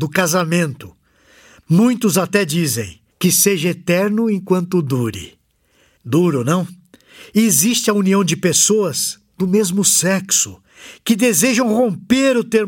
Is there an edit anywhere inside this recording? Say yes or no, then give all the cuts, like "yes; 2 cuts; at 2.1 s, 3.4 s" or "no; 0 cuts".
yes; 1 cut; at 3.1 s